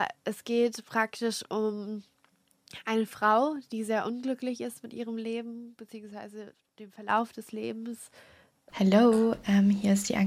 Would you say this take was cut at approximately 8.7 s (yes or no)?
yes